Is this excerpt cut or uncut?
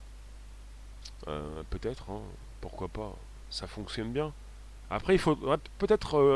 cut